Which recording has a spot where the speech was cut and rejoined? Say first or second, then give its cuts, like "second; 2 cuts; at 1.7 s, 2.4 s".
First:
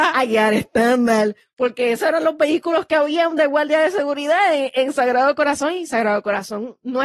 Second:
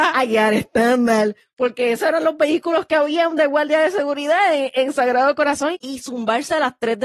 second; 1 cut; at 5.7 s